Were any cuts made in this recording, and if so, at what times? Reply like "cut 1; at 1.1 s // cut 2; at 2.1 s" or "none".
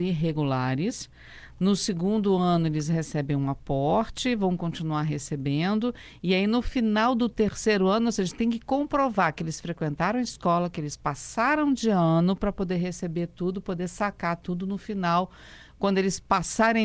none